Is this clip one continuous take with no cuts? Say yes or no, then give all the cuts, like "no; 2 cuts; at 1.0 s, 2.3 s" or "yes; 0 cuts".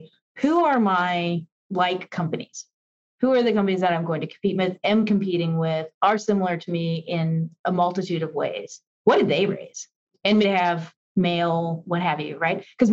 no; 1 cut; at 10.4 s